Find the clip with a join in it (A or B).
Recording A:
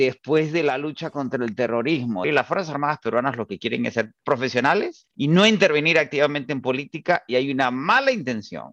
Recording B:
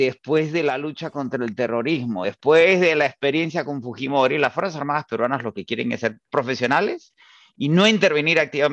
A